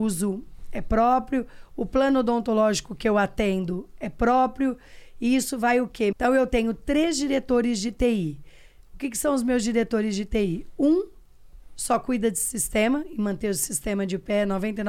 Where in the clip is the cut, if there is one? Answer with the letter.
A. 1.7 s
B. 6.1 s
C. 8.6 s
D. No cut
B